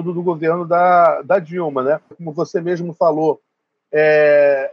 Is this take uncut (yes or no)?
no